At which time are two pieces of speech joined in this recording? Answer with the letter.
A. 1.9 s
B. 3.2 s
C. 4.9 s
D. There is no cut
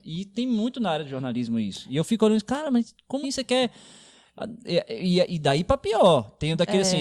B